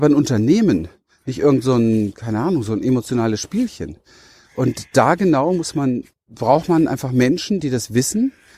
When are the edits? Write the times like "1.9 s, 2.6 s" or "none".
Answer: none